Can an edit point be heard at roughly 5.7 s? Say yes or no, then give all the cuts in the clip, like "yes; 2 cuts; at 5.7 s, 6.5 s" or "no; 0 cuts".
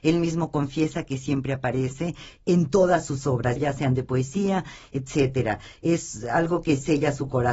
no; 1 cut; at 3.6 s